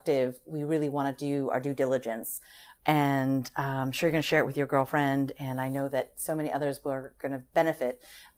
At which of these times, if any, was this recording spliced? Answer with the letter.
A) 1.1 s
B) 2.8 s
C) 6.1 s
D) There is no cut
B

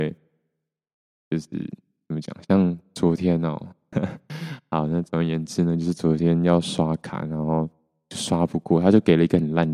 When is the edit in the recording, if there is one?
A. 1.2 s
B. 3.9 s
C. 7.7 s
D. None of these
B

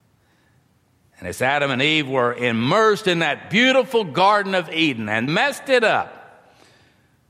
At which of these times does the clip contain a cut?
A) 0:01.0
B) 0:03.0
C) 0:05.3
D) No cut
C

